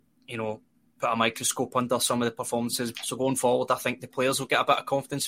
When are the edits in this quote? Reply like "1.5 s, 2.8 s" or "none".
2.9 s